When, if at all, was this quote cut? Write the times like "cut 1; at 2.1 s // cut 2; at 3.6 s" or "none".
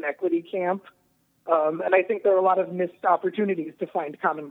none

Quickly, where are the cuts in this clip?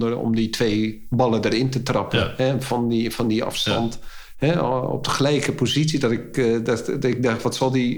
none

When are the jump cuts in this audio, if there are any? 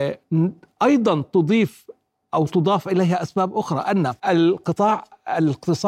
cut 1; at 4.2 s

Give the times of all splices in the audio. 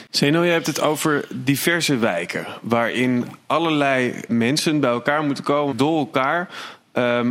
cut 1; at 4.3 s // cut 2; at 5.7 s

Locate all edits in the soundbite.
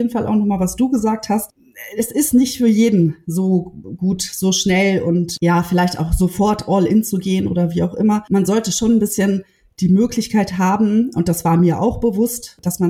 none

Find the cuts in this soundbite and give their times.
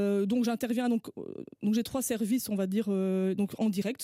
none

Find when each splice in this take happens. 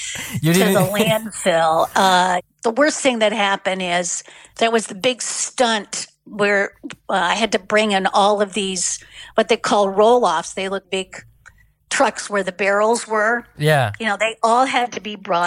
cut 1; at 10.8 s

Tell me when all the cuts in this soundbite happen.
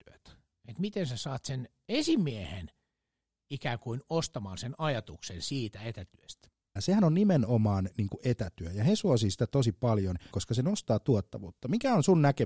cut 1; at 6.8 s // cut 2; at 10.3 s

